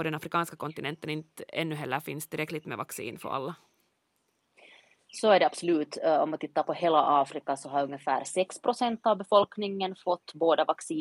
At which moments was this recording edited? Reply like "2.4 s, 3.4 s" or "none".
none